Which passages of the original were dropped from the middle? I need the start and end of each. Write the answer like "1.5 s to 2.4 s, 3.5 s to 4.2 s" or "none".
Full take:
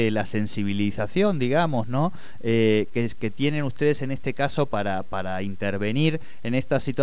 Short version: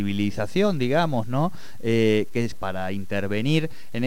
3.1 s to 5.0 s